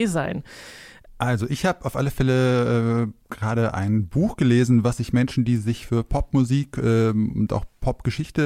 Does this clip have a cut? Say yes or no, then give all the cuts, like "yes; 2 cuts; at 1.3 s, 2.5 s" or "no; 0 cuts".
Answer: yes; 1 cut; at 1.1 s